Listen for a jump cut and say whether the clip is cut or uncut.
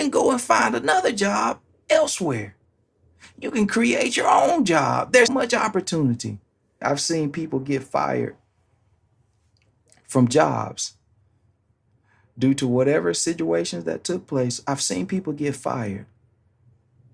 cut